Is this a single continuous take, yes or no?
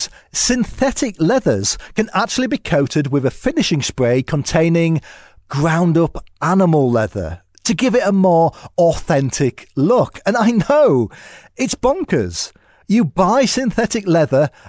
yes